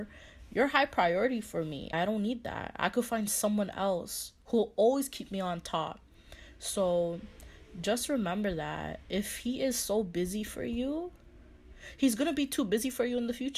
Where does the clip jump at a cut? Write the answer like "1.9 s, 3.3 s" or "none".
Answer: 1.9 s